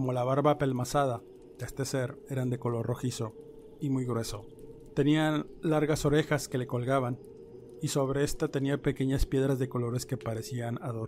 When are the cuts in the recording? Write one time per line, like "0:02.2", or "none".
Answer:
none